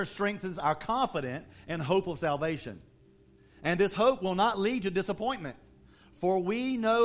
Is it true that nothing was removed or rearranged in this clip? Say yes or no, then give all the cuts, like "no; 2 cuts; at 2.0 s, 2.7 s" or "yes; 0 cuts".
yes; 0 cuts